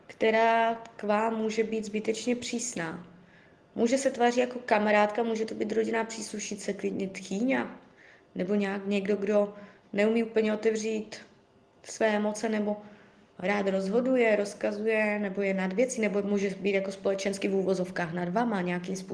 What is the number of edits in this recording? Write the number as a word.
zero